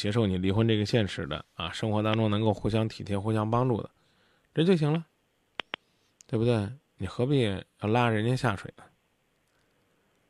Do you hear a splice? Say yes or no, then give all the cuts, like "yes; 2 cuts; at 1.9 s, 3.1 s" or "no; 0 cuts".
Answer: no; 0 cuts